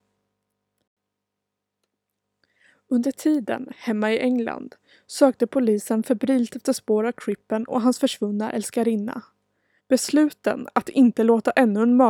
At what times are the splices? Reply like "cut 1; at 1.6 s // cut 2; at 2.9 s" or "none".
cut 1; at 9.8 s